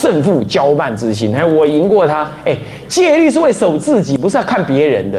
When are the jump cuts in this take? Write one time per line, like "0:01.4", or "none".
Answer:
none